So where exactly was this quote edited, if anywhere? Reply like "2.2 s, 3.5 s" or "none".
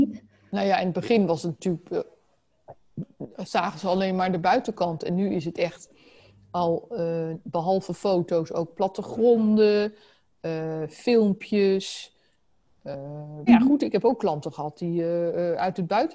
3.3 s, 13.5 s